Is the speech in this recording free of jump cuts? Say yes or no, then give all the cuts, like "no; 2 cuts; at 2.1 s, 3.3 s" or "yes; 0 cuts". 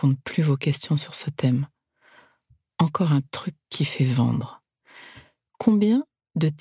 yes; 0 cuts